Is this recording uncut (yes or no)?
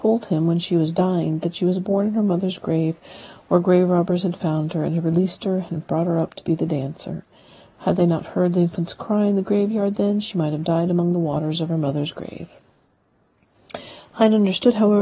yes